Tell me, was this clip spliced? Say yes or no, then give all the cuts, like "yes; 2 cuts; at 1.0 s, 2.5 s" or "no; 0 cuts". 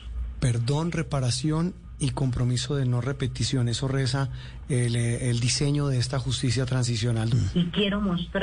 yes; 1 cut; at 7.3 s